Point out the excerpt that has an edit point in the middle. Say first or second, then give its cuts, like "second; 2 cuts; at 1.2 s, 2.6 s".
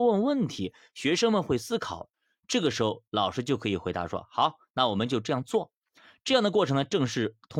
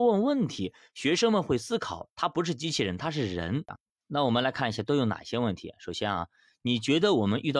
first; 1 cut; at 2.1 s